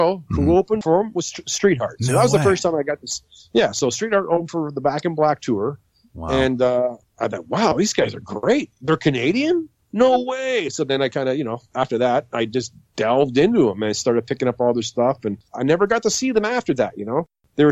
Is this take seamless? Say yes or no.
yes